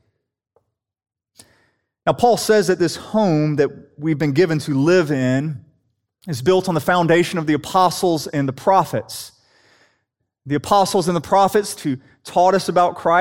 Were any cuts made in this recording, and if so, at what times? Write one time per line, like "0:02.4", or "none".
0:11.8